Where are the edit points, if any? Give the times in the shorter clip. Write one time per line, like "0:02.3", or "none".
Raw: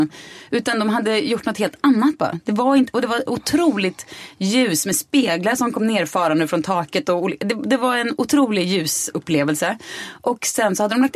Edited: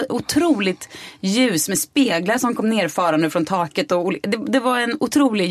none